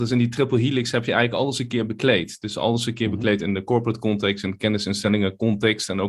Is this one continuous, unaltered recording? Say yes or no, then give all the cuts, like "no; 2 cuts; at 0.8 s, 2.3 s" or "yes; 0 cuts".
yes; 0 cuts